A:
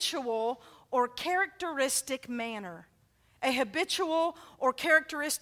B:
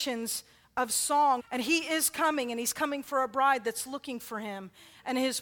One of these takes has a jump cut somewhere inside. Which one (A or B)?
B